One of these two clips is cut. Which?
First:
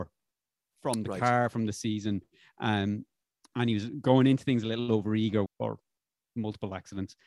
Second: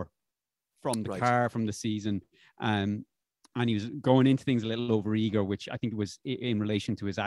first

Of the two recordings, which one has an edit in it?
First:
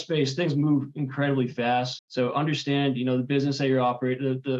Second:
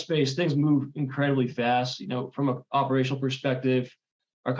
first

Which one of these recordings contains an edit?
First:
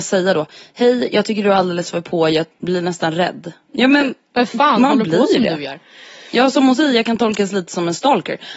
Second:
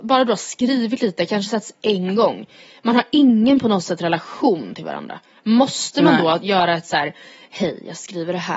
first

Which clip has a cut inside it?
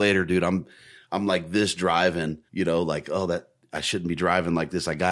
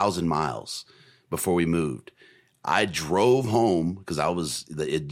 first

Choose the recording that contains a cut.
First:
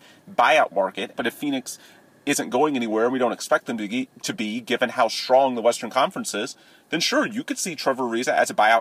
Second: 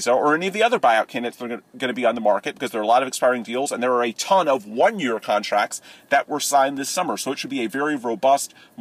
first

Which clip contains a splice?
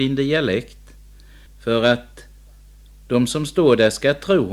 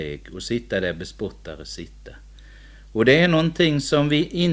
first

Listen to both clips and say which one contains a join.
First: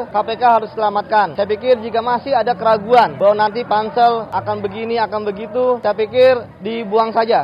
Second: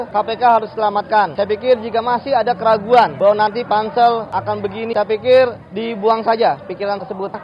second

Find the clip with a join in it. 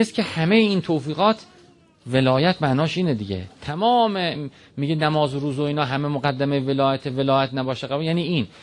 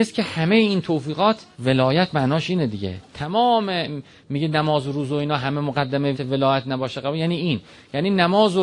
second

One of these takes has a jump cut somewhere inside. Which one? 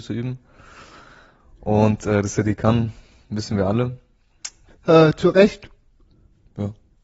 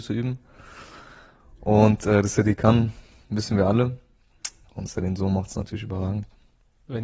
first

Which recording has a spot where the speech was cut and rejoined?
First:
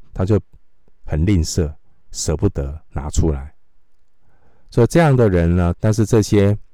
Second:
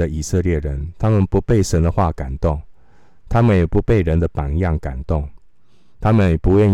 first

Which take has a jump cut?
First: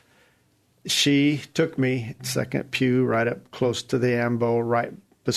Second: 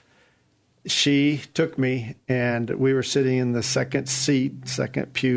first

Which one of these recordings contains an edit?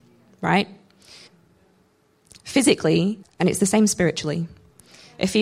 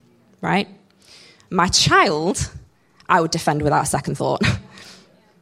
first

